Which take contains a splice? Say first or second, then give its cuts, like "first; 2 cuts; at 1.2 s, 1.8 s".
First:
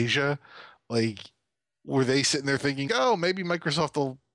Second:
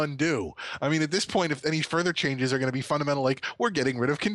first; 1 cut; at 2.9 s